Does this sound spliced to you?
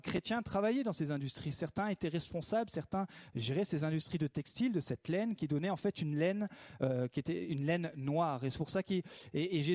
no; 0 cuts

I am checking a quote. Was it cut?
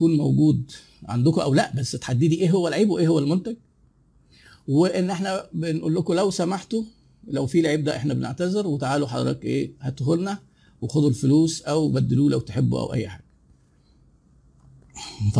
no; 0 cuts

